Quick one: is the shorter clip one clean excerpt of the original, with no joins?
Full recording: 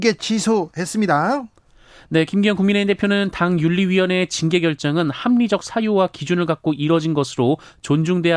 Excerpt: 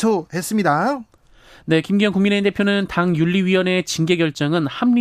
yes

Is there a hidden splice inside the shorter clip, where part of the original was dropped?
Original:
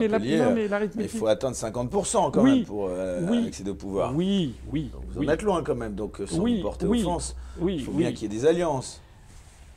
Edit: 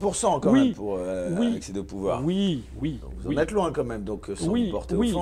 no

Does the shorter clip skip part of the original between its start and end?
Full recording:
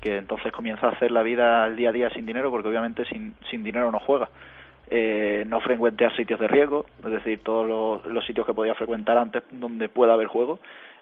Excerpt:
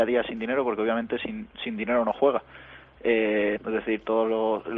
yes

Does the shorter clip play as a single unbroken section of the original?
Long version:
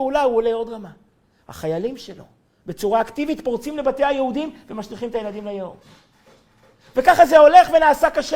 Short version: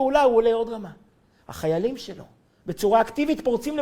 yes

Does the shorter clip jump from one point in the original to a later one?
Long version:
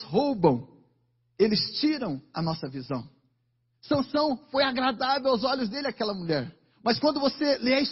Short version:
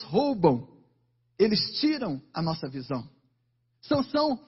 no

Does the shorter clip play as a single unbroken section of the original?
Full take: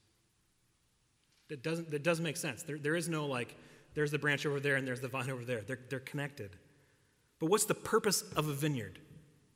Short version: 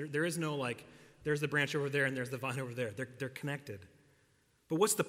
yes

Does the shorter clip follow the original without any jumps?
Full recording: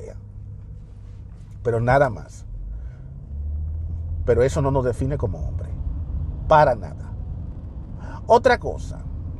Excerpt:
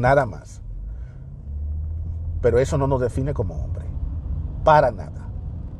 yes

